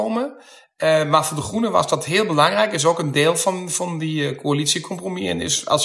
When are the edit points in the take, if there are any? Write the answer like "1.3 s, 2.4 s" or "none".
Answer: none